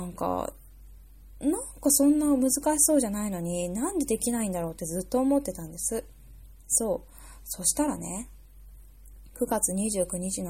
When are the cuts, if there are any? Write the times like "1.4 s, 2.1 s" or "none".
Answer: none